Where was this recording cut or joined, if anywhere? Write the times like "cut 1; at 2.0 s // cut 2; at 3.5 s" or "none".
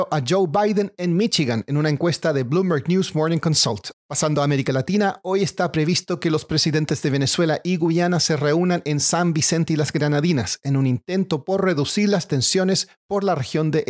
cut 1; at 3.9 s